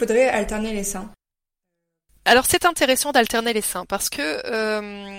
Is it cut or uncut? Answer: uncut